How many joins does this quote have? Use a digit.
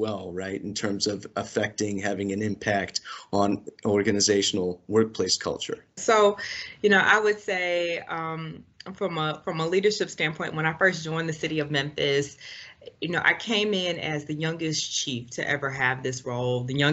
1